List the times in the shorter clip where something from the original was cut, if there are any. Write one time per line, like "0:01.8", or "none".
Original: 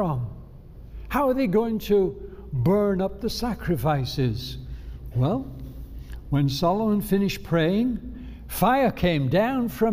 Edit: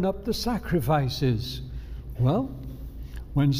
none

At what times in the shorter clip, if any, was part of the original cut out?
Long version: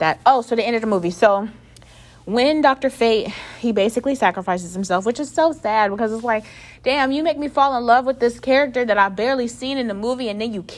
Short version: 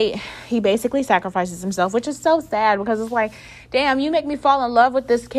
none

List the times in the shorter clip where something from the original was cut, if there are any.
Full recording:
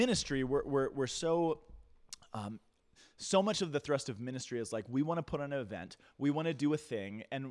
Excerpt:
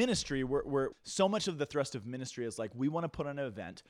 0:00.9

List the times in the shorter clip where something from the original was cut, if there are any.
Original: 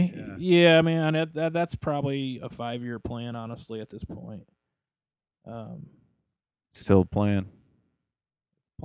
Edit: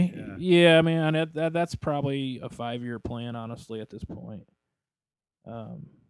none

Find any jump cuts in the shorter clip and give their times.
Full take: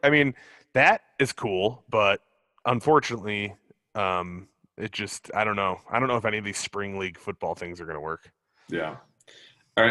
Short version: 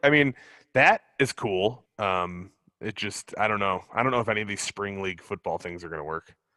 0:01.9

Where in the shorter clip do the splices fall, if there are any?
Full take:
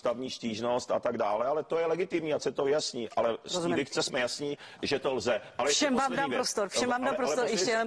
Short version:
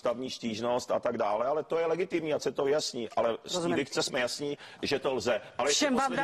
none

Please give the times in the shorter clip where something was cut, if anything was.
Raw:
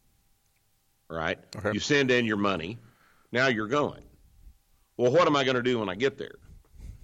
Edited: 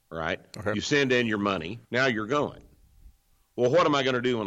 0:01.8

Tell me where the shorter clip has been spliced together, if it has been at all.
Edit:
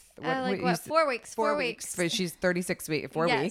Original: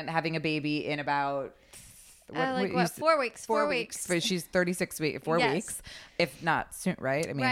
none

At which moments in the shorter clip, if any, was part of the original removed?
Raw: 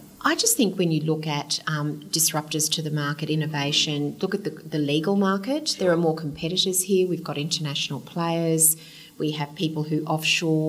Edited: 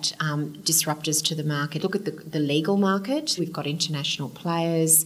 0:01.8
0:03.4

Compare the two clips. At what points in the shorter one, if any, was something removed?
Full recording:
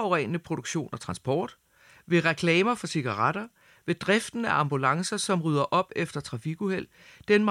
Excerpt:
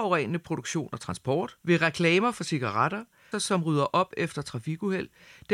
0:01.6
0:03.3

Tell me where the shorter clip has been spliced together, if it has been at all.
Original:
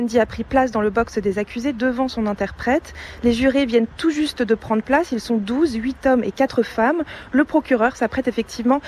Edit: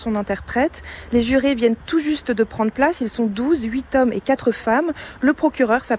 none

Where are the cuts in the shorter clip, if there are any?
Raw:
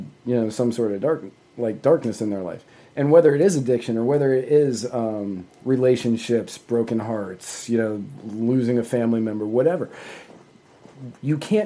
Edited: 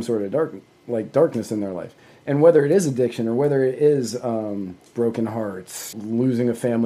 0:04.9
0:05.9

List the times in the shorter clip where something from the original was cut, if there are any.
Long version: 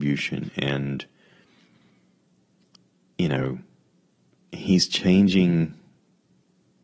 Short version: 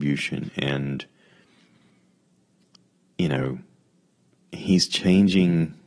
none

